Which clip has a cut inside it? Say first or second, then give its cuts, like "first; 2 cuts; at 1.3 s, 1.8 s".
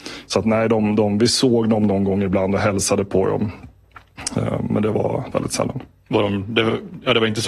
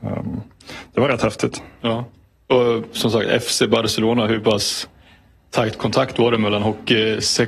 first; 1 cut; at 5.3 s